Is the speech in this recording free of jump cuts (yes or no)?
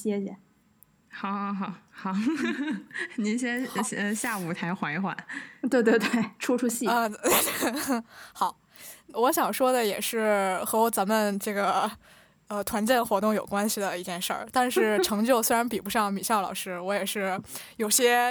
no